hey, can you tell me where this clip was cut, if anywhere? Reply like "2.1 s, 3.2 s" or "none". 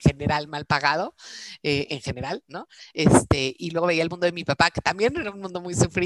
none